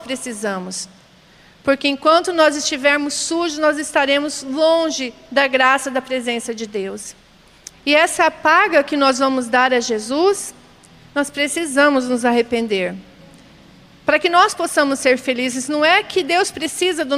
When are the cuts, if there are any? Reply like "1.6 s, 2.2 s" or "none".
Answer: 7.7 s